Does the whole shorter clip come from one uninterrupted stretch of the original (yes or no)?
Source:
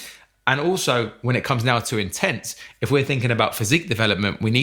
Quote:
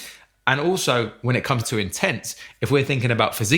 no